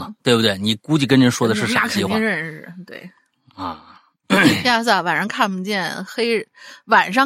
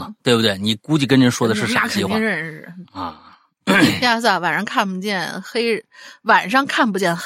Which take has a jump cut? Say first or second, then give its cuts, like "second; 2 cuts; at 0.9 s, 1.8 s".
second; 1 cut; at 2.8 s